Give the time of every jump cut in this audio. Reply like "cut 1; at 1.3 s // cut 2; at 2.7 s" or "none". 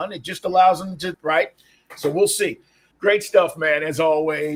cut 1; at 1.1 s // cut 2; at 2.9 s